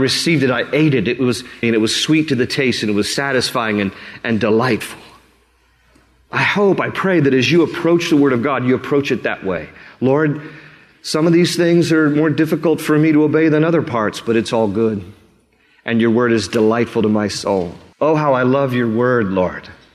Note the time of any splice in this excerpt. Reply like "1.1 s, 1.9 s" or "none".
1.6 s, 17.9 s